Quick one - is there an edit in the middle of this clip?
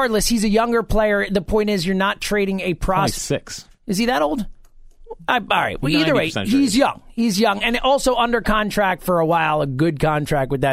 yes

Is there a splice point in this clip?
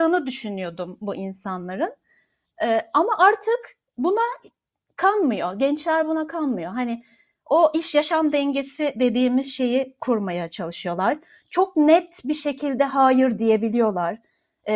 no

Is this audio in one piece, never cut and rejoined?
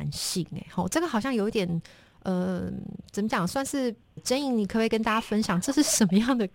no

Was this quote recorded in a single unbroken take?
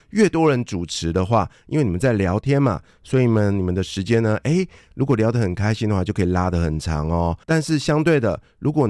no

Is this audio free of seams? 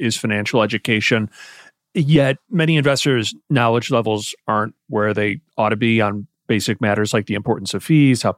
yes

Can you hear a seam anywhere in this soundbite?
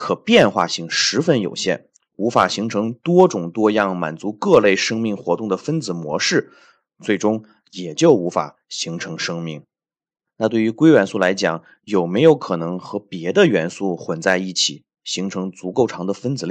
no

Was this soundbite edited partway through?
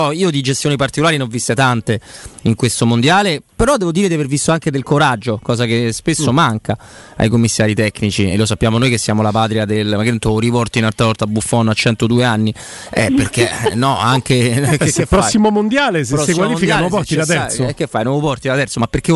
no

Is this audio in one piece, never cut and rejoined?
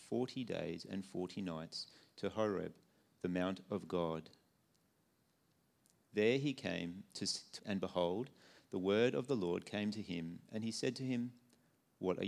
no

